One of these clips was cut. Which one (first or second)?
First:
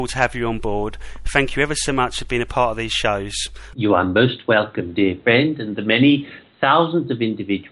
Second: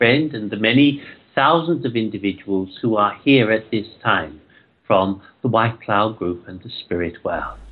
first